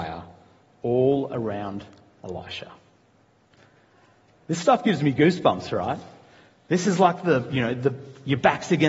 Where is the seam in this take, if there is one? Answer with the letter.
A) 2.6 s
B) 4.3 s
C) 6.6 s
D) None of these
D